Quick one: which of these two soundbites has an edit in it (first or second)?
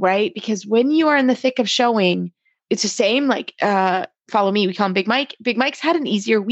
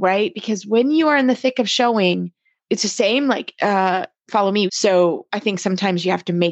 second